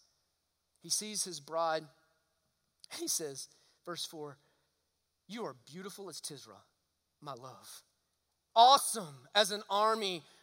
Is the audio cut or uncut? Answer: cut